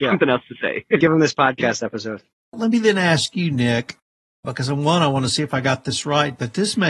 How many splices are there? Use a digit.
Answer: 2